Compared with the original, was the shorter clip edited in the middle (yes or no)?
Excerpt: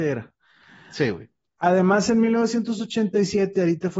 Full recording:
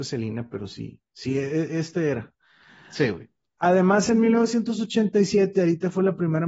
no